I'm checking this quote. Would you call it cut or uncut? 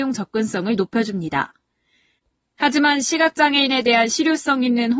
uncut